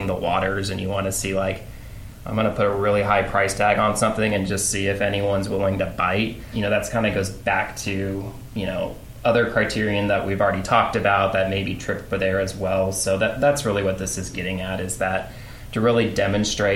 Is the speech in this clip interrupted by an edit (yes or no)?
no